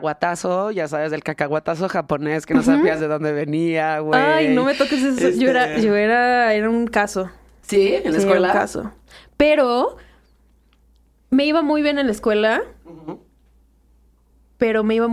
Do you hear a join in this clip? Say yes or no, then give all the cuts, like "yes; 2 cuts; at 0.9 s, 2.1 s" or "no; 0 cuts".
no; 0 cuts